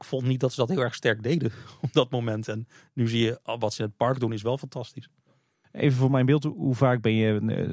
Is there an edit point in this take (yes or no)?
no